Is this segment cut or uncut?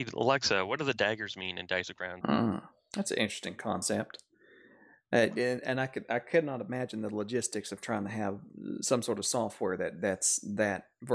cut